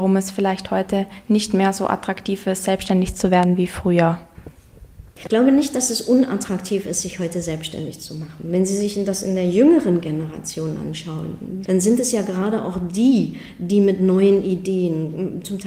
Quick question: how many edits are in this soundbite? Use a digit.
2